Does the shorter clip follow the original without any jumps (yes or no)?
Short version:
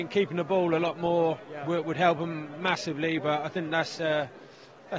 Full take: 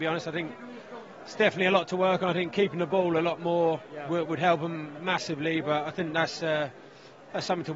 yes